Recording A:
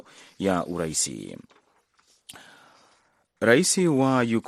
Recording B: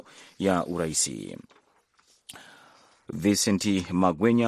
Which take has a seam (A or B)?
B